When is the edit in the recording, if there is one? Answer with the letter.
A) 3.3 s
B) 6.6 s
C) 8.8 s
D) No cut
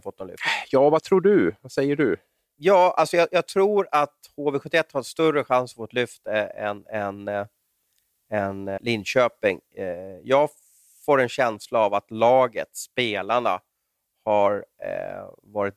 C